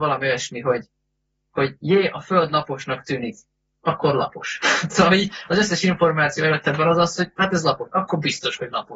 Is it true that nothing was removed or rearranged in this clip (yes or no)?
yes